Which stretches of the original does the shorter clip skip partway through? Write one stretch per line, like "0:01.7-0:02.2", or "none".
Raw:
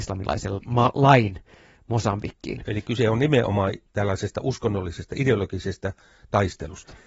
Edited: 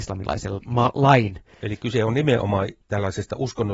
0:01.6-0:02.7